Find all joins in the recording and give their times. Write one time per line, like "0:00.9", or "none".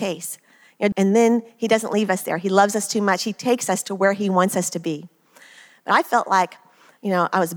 0:00.9